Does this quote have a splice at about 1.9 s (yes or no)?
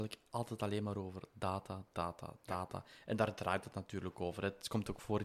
no